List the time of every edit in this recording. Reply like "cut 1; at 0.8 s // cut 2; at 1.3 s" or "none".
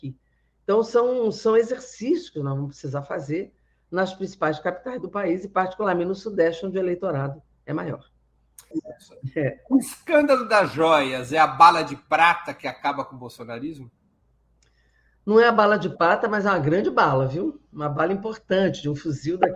cut 1; at 8.7 s